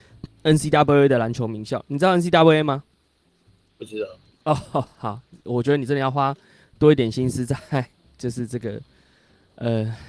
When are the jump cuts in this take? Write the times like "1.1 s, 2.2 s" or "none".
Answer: none